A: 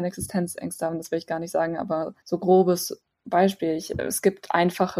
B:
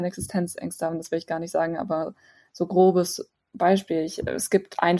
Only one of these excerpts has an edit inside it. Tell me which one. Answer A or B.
A